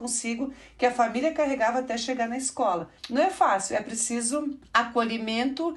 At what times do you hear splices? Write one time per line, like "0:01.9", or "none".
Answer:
0:03.0